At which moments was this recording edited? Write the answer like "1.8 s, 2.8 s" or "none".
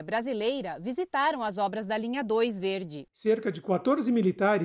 3.1 s